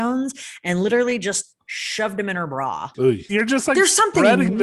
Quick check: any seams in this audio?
yes; 1 cut; at 3.3 s

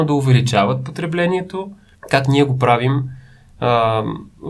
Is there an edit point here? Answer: yes; 1 cut; at 2.0 s

